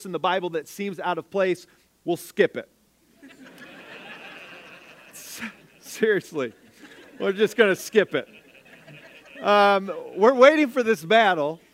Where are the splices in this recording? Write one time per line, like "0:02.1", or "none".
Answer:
none